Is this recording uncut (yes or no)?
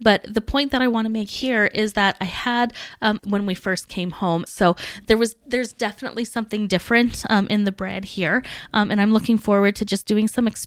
no